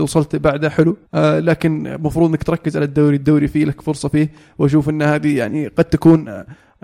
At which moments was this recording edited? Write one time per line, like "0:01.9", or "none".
0:01.1